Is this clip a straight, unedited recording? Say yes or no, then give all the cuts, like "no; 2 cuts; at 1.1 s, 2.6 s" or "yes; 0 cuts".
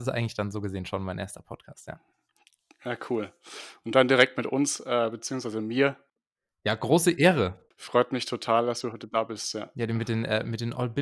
yes; 0 cuts